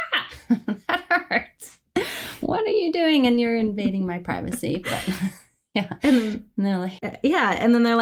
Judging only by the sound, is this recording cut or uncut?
uncut